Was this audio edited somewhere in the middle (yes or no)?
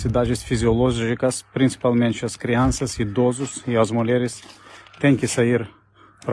no